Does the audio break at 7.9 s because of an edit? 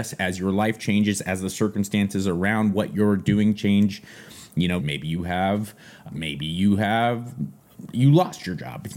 no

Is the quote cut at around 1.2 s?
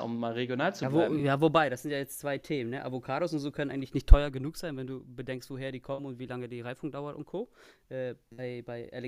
no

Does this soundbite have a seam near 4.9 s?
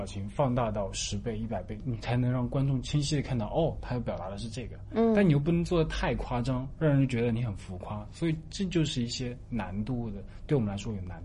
no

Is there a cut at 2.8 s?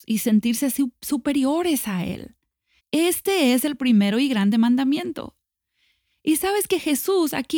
yes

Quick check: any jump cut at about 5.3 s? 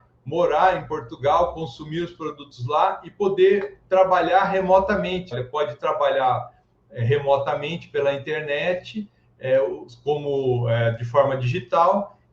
yes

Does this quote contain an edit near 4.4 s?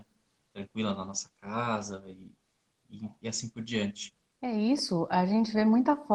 yes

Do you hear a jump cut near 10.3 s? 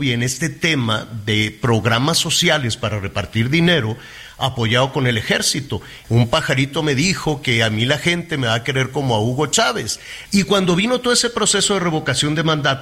yes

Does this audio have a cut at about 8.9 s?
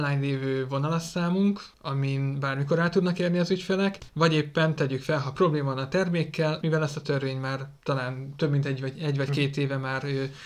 no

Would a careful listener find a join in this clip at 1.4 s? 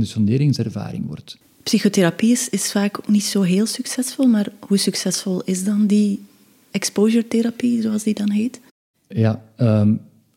yes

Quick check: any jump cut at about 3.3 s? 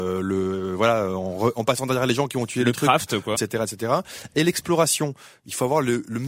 yes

